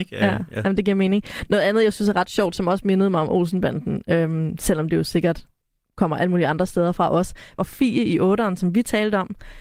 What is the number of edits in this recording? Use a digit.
1